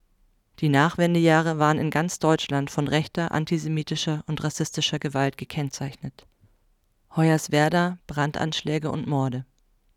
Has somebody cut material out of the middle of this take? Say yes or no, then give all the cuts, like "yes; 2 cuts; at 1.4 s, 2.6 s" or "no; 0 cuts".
yes; 1 cut; at 8.0 s